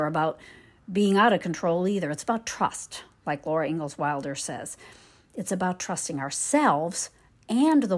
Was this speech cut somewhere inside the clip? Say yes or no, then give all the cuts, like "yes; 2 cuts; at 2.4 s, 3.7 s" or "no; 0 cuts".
no; 0 cuts